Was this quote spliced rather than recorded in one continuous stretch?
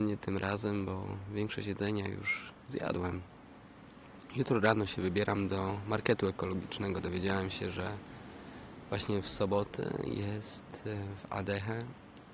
no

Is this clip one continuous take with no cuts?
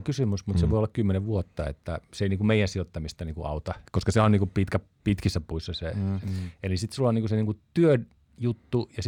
no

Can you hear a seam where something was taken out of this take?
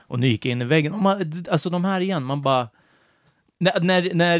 no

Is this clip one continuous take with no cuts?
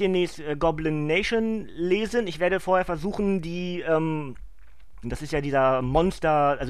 no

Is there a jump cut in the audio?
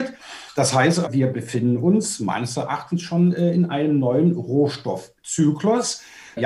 yes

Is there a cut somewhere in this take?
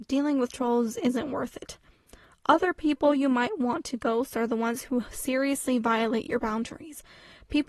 no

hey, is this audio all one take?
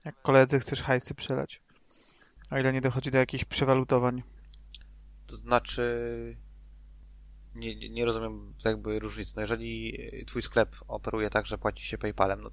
yes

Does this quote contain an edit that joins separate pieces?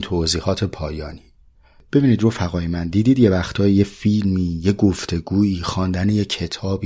no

